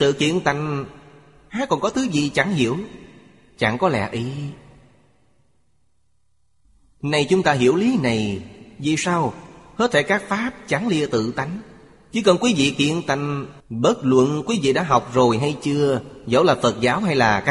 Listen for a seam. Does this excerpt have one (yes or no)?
yes